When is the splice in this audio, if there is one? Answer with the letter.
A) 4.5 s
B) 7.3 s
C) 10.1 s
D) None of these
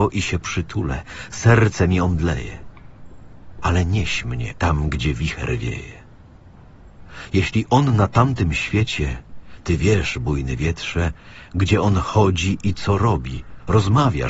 A